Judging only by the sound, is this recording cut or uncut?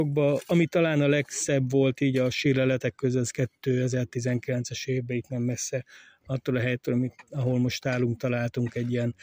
uncut